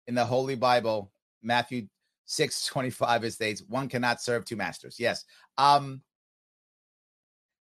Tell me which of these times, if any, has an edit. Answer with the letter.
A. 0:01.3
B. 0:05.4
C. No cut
C